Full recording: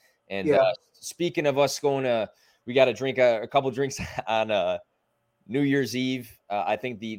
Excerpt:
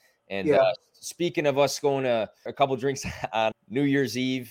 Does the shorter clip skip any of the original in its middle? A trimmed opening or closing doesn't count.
yes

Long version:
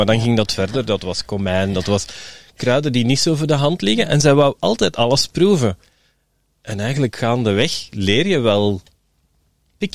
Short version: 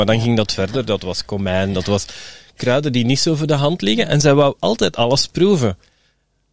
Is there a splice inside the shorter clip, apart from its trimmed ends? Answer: no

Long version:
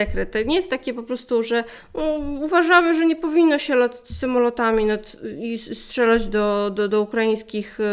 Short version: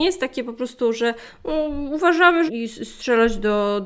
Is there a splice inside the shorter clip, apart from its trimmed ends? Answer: yes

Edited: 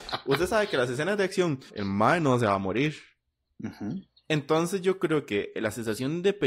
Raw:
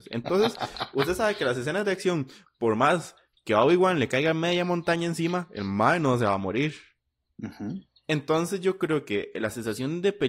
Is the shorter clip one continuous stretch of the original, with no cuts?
no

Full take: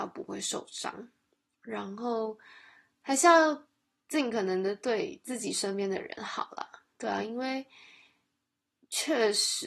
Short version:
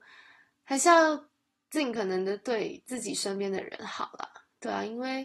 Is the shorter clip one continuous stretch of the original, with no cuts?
yes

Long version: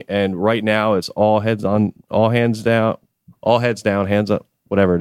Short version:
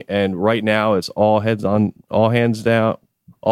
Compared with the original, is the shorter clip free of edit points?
yes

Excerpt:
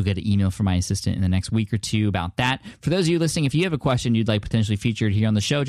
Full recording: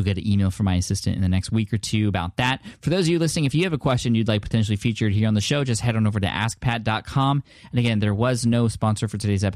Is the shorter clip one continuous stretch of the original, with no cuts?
yes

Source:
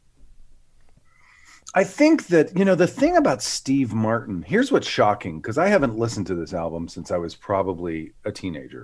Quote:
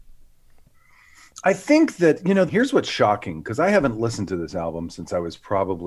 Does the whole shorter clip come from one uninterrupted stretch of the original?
no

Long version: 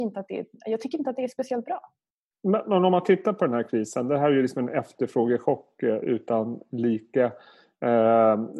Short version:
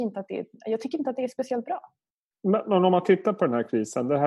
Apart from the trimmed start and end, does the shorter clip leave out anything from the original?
no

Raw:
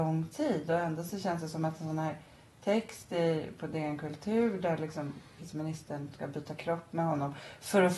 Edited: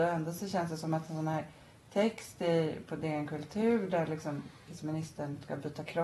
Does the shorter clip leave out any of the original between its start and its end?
no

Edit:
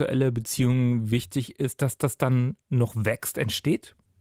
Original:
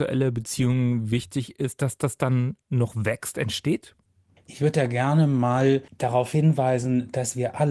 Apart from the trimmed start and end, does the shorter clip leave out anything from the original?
no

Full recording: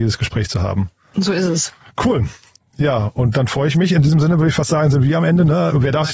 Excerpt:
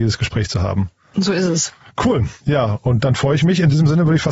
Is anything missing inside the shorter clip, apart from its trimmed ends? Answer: yes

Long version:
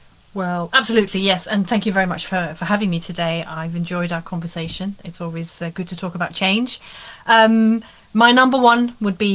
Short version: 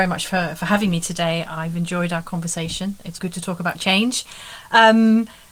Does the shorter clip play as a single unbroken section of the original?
no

